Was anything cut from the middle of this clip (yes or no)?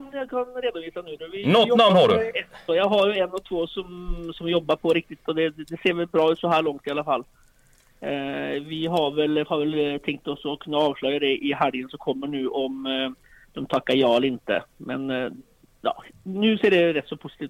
yes